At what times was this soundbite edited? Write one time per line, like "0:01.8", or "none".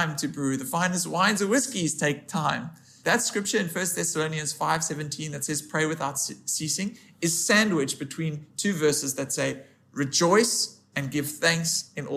0:03.0
0:10.9